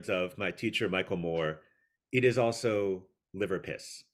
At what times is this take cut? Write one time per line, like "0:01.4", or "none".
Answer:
none